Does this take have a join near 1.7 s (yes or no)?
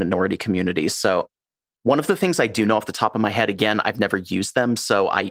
no